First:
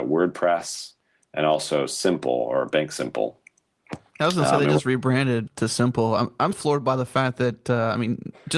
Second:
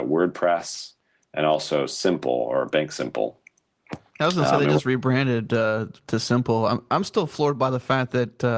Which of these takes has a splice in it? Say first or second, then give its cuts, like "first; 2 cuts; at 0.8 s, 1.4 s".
first; 2 cuts; at 5.5 s, 6.5 s